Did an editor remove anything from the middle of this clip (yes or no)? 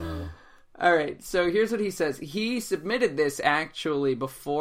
no